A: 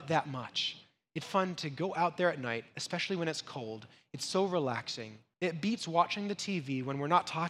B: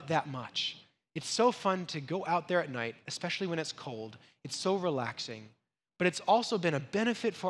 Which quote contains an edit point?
A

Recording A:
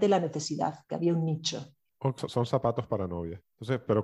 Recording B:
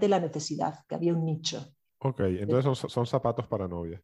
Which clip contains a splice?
A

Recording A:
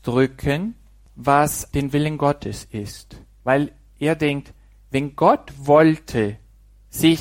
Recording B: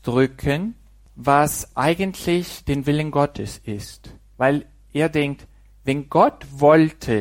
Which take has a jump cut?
A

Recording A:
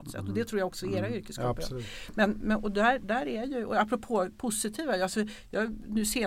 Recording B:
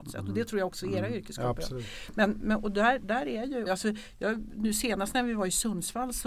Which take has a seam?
B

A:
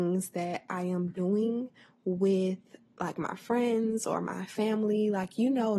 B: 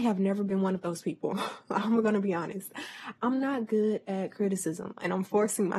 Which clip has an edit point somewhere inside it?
B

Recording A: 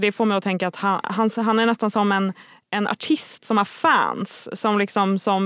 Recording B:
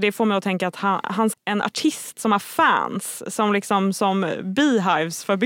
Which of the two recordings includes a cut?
B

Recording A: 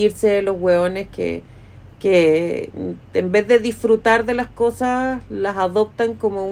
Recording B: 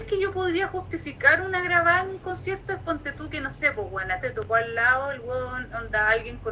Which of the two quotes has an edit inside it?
B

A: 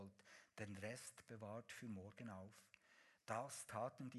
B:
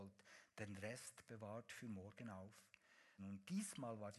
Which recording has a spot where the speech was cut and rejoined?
B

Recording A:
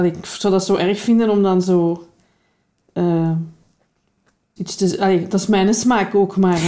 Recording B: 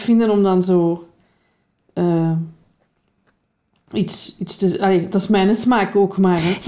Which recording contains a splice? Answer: A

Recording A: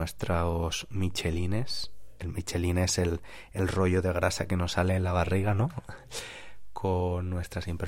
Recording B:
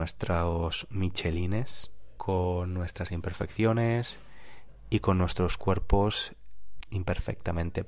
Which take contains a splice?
B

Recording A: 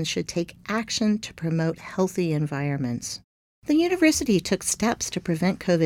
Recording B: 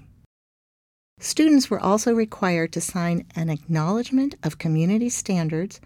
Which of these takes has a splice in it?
A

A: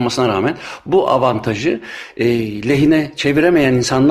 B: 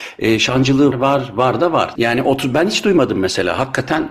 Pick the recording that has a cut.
B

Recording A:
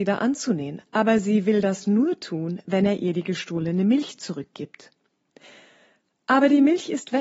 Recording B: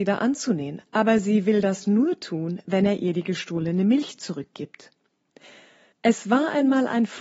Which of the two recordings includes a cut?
B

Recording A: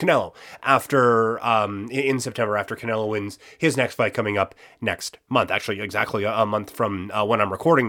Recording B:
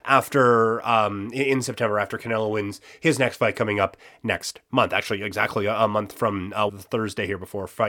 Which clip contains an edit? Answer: B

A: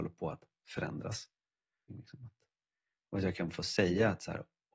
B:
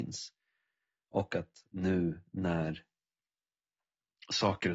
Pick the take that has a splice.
A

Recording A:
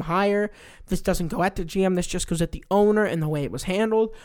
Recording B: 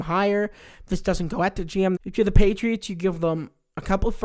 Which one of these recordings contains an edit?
B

